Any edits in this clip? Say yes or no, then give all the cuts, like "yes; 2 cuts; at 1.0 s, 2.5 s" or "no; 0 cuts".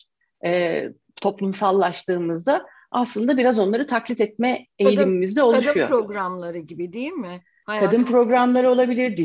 no; 0 cuts